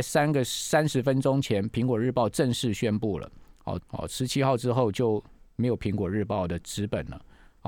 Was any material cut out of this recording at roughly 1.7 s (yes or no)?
no